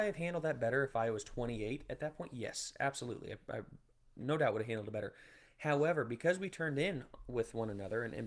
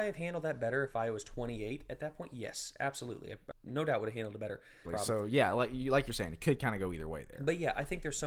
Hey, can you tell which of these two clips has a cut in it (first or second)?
second